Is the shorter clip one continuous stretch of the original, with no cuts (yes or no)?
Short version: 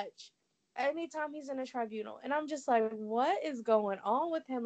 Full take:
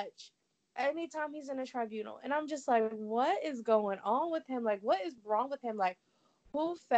yes